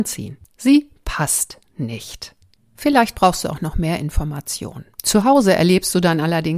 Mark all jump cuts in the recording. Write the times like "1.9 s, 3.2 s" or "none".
2.6 s, 4.9 s